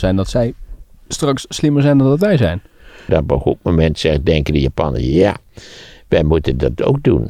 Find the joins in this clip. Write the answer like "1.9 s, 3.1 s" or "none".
3.1 s